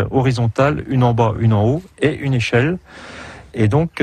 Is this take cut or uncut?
uncut